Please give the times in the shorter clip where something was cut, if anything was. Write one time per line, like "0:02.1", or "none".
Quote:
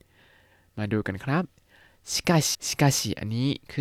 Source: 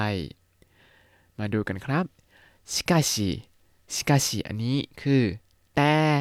0:02.5